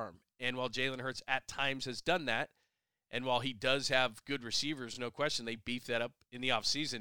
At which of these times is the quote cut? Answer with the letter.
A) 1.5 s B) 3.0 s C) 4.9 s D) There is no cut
D